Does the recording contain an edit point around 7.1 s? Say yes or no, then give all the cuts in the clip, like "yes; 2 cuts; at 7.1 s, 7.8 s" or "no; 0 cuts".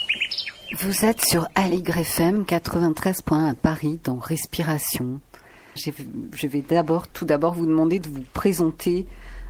yes; 2 cuts; at 5.8 s, 7.1 s